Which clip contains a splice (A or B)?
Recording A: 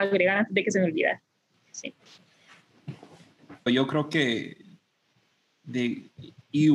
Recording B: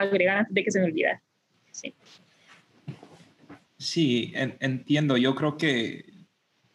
A